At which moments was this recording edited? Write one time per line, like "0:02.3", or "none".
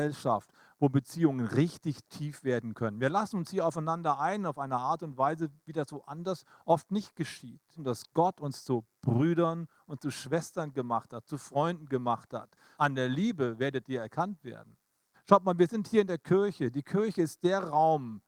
0:07.8
0:12.7
0:15.1